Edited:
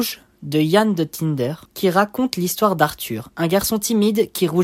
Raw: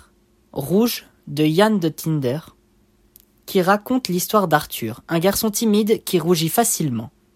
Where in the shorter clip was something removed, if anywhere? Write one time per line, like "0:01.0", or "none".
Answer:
0:01.7